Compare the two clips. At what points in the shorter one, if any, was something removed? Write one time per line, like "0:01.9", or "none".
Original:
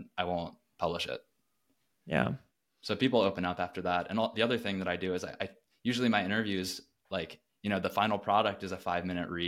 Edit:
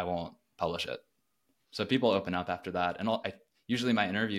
0:01.6
0:03.2